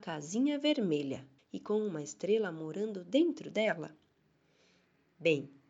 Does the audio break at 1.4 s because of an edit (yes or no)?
yes